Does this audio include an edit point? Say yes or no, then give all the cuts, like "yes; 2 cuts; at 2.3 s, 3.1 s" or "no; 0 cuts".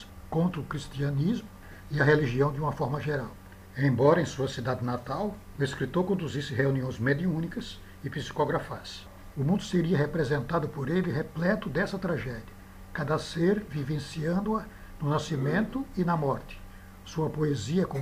yes; 3 cuts; at 5.5 s, 9.3 s, 17.0 s